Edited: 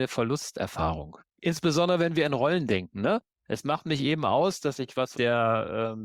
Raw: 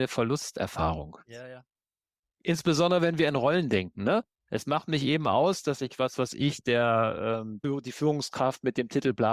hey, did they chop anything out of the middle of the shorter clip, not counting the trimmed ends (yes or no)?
yes